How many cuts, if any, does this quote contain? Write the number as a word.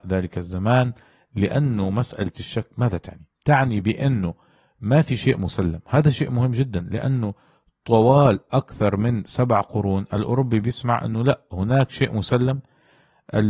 one